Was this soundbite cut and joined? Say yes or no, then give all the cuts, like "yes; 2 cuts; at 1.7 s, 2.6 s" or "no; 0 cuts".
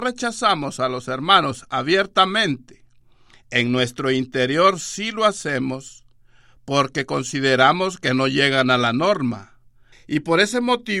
yes; 1 cut; at 9.9 s